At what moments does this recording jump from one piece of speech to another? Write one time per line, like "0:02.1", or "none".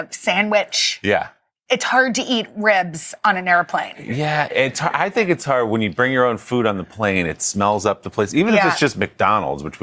none